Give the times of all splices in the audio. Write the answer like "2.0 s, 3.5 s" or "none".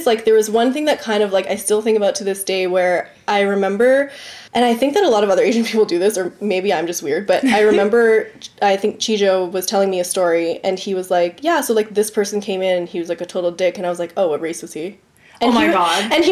4.5 s

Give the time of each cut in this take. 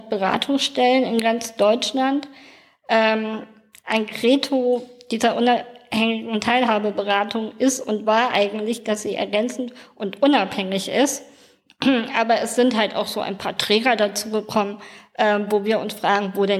none

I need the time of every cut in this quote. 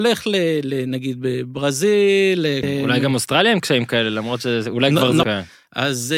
2.6 s, 5.2 s

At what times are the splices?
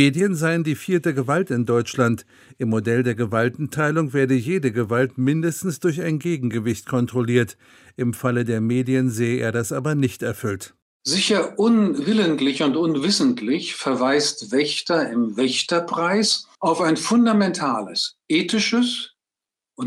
16.5 s, 18.2 s

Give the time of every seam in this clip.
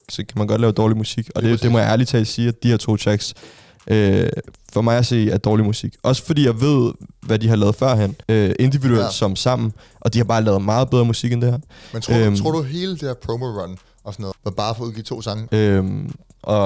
8.2 s, 14.3 s, 15.5 s

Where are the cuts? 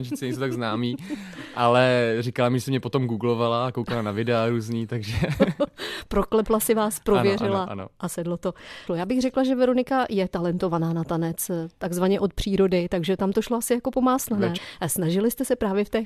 8.9 s, 14.6 s

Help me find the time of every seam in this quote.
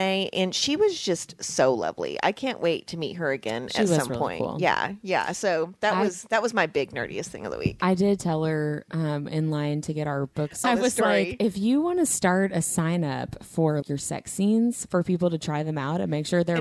10.6 s, 13.8 s

